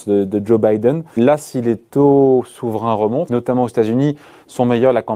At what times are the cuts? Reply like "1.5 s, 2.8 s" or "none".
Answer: 1.2 s, 3.3 s